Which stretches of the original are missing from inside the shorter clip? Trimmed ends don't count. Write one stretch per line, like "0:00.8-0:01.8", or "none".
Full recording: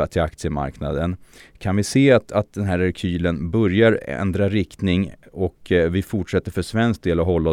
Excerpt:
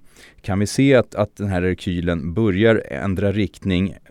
none